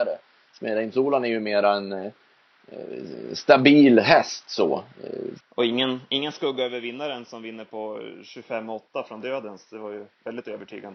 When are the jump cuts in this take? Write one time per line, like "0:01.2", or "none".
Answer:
0:05.4

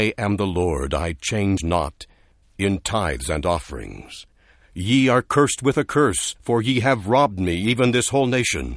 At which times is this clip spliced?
0:02.4

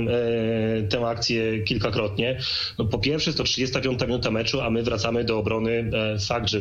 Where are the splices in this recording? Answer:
none

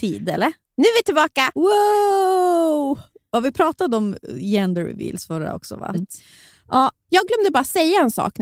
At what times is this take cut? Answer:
0:01.6
0:05.9

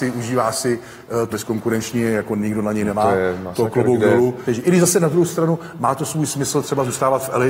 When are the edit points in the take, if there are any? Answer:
0:01.3
0:04.5

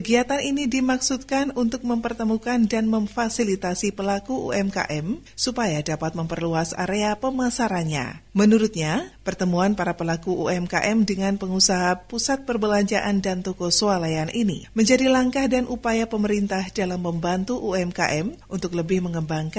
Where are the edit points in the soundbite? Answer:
none

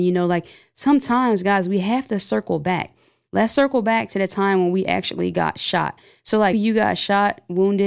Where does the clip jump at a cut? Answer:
0:06.5

